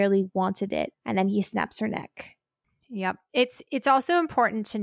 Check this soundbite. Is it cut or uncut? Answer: cut